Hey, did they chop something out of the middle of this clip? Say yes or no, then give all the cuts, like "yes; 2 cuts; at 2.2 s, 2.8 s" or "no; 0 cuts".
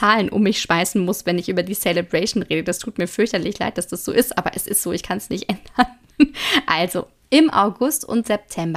no; 0 cuts